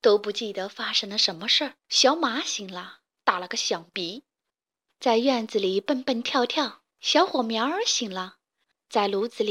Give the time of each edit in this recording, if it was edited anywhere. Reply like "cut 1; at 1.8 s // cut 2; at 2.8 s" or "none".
cut 1; at 1.8 s // cut 2; at 4.9 s // cut 3; at 6.9 s